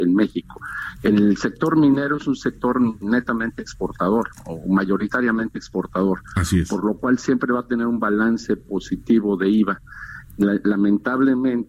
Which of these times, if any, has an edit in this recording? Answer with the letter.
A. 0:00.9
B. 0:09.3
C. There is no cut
A